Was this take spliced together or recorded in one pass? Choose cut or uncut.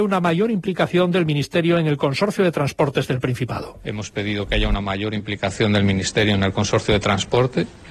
uncut